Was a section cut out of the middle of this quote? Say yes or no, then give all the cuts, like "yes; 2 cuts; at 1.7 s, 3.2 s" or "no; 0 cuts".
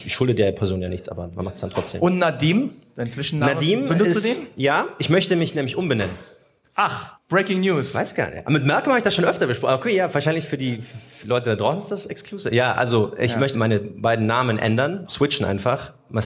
yes; 2 cuts; at 13.5 s, 15.1 s